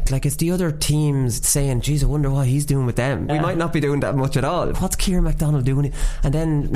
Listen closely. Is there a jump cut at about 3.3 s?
yes; 2 cuts; at 3.3 s, 4.7 s

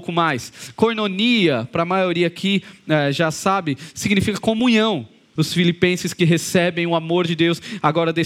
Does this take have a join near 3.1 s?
no; 1 cut; at 5.4 s

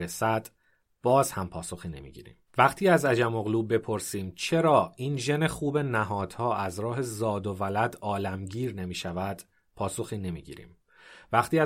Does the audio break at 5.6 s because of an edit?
no; 1 cut; at 2.5 s

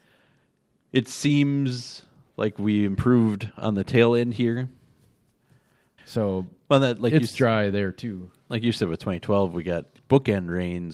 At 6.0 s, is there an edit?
yes; 1 cut; at 6.0 s

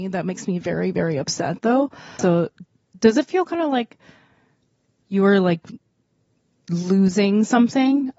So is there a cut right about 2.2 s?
yes; 1 cut; at 2.2 s

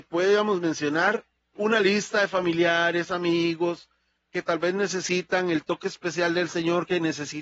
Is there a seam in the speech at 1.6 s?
yes; 1 cut; at 1.6 s

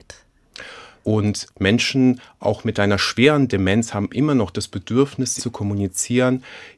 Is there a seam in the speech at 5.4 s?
yes; 2 cuts; at 1.0 s, 5.4 s

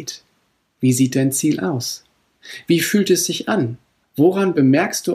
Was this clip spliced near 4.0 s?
yes; 1 cut; at 4.0 s

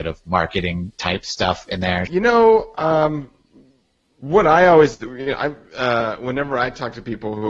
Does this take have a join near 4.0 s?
no; 1 cut; at 2.1 s

